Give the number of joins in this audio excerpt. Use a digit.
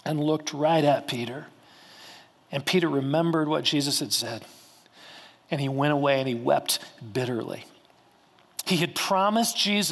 1